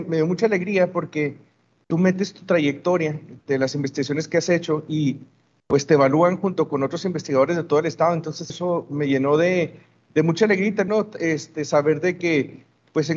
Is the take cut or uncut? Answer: cut